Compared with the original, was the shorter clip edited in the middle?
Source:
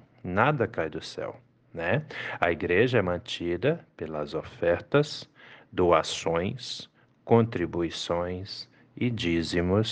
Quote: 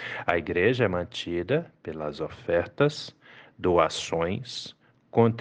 no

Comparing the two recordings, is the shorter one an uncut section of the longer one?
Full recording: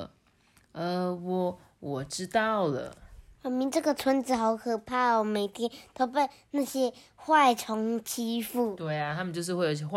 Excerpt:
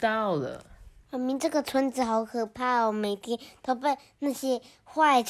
yes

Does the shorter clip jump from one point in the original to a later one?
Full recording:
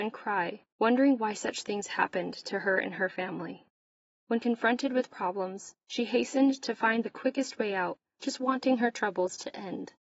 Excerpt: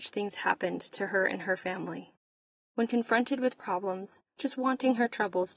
yes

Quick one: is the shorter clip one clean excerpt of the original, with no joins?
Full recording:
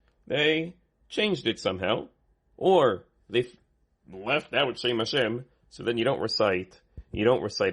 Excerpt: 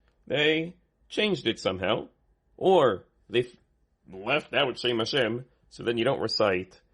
yes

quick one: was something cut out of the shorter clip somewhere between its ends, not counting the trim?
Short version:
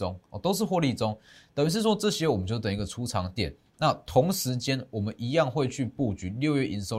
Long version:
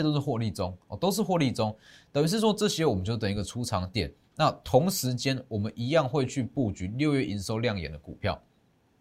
no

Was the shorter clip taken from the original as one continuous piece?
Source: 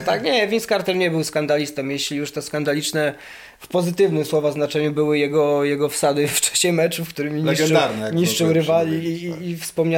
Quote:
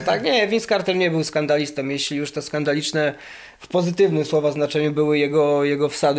yes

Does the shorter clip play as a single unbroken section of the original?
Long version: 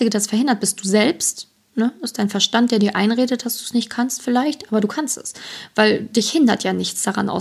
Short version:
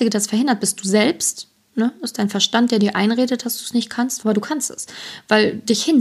no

